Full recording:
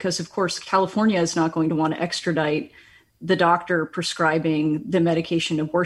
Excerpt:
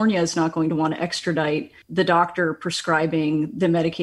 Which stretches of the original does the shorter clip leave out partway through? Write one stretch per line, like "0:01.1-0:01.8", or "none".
0:02.8-0:03.1